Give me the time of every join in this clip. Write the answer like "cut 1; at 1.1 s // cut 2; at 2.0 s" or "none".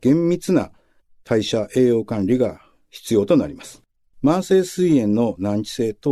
cut 1; at 4.1 s